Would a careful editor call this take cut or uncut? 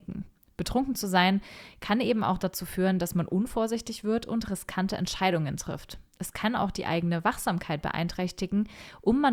uncut